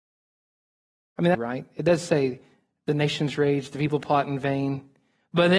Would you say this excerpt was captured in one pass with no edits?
no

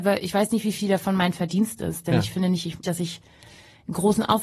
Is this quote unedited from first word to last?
no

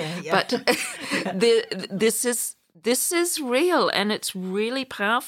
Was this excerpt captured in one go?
yes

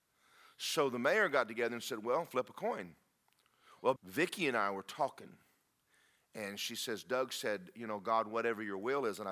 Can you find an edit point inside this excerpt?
yes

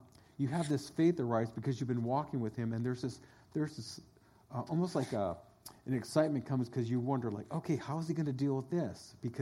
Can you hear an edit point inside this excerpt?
no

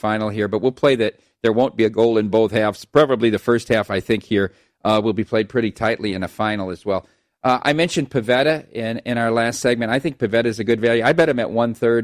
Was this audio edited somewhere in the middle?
no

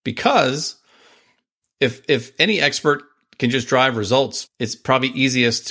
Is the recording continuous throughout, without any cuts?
no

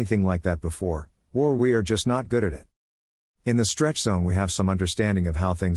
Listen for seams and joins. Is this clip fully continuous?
yes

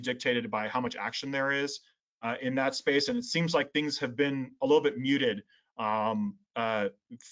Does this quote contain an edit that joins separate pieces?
no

